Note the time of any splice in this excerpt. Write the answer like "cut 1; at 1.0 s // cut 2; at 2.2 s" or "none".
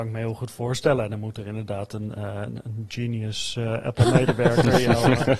cut 1; at 2.2 s